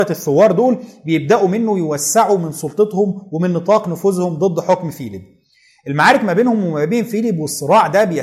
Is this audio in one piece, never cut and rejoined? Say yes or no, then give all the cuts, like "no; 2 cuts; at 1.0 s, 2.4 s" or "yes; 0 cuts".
yes; 0 cuts